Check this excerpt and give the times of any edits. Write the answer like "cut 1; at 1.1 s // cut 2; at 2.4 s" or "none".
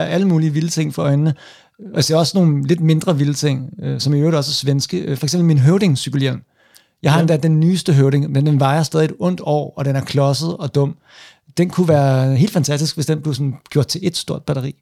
none